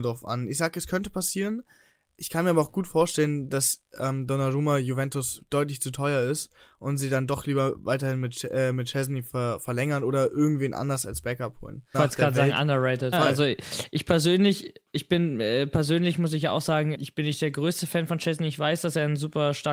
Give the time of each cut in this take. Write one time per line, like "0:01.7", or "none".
0:11.9
0:13.1
0:16.9